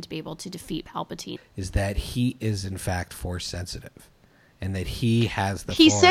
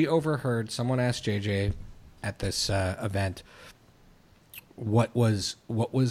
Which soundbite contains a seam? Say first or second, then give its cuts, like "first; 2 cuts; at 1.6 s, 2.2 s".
first; 1 cut; at 1.4 s